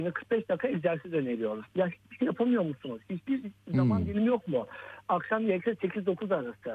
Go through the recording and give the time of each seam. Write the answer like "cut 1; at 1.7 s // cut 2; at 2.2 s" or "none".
none